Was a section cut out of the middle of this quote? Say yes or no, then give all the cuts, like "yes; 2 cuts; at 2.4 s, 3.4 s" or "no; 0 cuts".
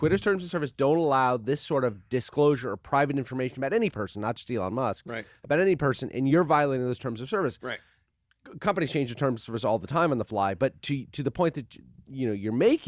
no; 0 cuts